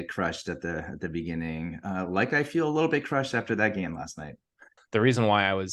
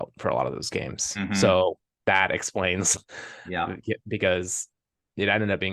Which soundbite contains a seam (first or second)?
first